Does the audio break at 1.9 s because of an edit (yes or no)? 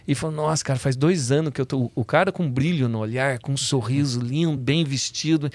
no